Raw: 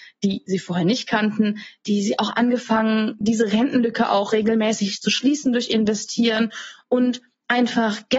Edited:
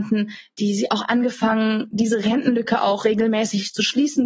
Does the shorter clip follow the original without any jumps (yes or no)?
yes